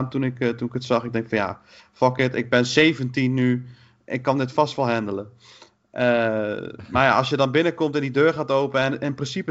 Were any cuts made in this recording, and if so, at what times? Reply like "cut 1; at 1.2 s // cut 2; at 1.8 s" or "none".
none